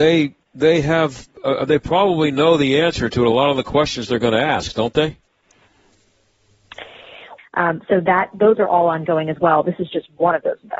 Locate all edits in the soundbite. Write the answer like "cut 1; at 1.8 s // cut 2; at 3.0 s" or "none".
cut 1; at 7.4 s